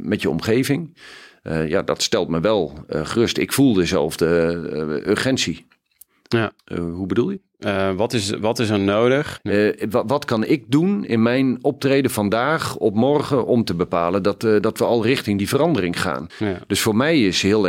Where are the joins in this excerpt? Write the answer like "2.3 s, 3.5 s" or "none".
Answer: 6.6 s, 9.4 s, 16.3 s